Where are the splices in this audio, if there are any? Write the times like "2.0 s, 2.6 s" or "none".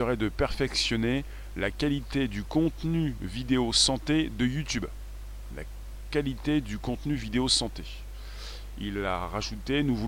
none